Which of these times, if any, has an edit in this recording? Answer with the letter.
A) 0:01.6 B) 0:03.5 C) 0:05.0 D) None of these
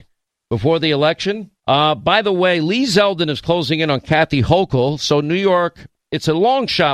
A